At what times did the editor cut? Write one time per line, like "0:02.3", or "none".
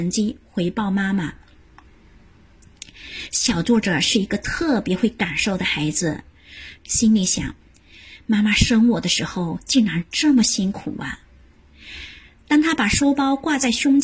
0:03.3
0:06.8